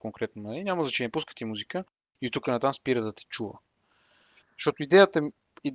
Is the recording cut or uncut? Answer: uncut